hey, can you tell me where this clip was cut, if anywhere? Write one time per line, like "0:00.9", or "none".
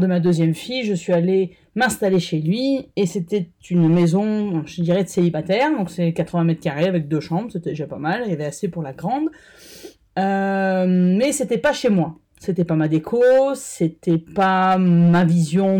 none